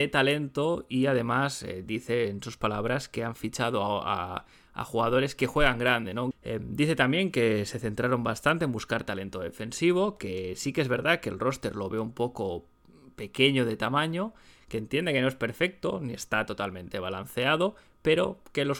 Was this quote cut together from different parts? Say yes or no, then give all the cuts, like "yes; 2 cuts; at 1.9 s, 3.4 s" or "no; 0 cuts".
yes; 1 cut; at 6.3 s